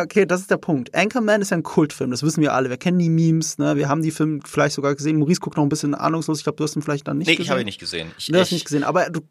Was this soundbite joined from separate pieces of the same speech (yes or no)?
no